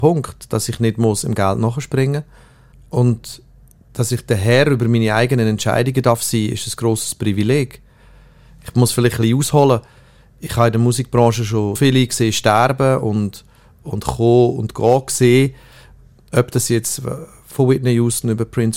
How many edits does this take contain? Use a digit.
1